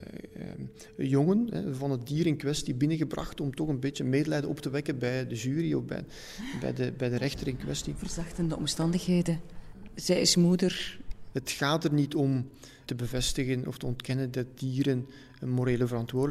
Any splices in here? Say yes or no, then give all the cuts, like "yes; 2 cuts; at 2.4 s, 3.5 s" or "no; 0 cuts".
yes; 2 cuts; at 11.3 s, 12.9 s